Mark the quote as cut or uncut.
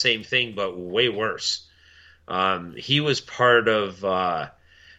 uncut